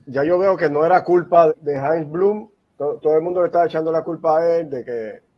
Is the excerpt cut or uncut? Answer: cut